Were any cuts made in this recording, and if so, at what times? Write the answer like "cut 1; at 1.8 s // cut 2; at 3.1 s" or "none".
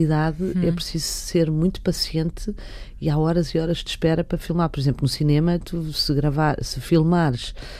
none